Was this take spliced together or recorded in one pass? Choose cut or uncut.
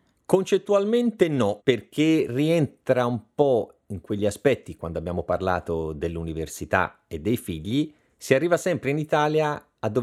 cut